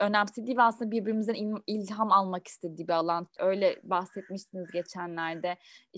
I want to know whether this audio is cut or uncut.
cut